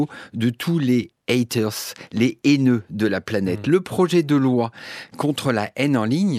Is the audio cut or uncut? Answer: uncut